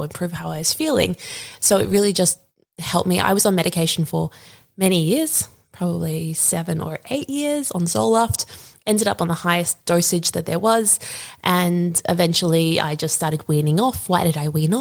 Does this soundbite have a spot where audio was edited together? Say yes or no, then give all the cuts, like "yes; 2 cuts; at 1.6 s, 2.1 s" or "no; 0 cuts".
no; 0 cuts